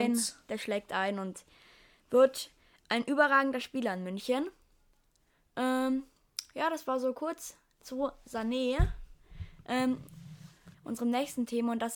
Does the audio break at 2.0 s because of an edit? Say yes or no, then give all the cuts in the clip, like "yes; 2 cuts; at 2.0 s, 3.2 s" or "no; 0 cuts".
no; 1 cut; at 10.7 s